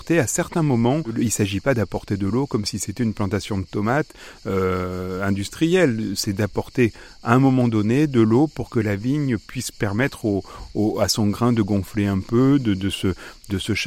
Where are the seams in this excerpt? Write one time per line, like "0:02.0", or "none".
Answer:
none